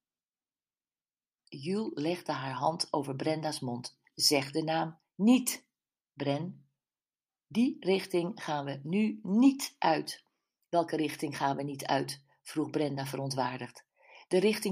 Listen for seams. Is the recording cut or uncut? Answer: cut